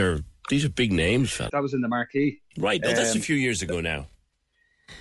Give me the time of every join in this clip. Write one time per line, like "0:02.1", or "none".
0:01.5